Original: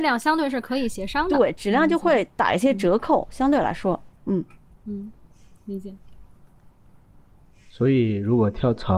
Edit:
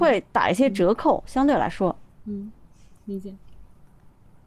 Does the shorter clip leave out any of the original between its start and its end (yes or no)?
yes